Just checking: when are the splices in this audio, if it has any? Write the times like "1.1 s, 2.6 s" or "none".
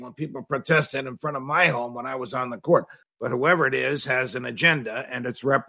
3.0 s